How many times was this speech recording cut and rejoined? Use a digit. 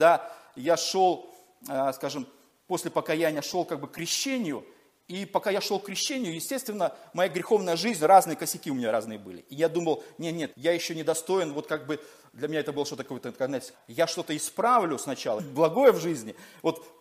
3